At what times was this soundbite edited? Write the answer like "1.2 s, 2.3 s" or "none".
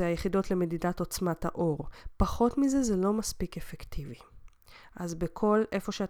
none

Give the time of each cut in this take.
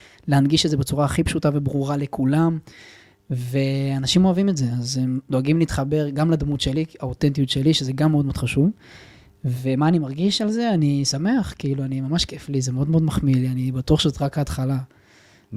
none

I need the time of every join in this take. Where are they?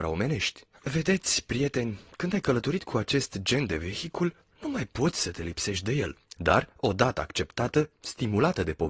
6.4 s, 7.9 s

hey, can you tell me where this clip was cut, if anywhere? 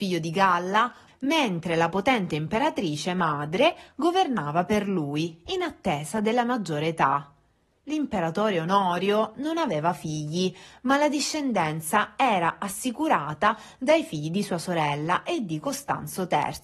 1.1 s, 7.8 s

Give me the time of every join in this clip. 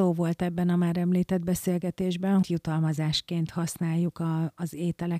2.4 s

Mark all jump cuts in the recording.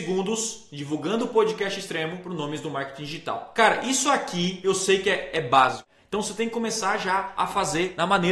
none

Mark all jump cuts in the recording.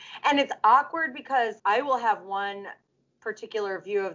1.6 s

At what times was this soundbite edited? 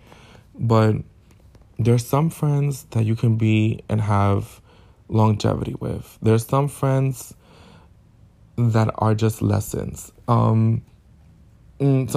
10.1 s

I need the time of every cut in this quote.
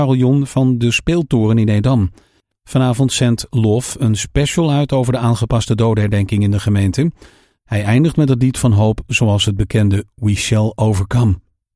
2.5 s, 7.6 s

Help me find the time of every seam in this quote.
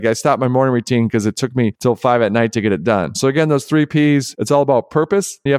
3.1 s

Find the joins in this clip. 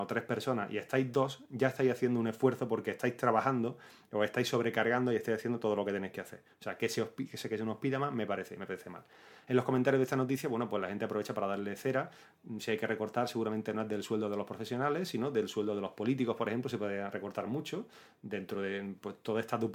none

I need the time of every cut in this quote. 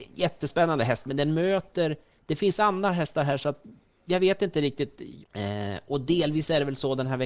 5.2 s

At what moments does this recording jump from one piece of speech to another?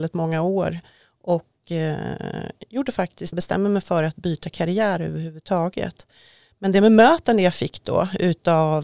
3.3 s

